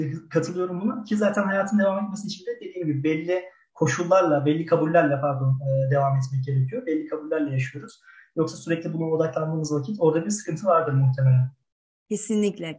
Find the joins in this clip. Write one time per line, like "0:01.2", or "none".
none